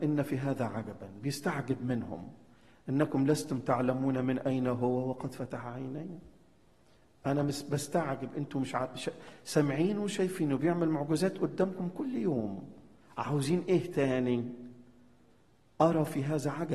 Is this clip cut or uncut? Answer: uncut